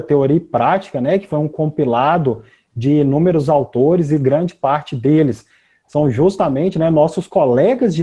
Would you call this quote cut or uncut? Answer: uncut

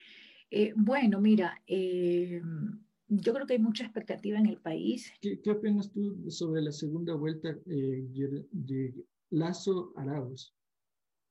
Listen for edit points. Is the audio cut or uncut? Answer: cut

